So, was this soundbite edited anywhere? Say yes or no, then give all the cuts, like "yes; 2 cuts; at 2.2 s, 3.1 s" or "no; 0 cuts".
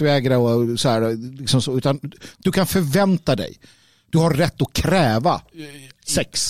no; 0 cuts